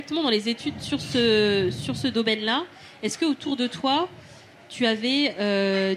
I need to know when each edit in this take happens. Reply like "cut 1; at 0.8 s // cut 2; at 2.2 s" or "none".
none